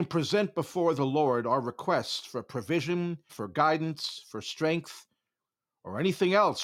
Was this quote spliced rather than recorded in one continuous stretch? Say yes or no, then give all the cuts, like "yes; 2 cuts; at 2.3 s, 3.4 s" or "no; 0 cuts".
yes; 1 cut; at 3.3 s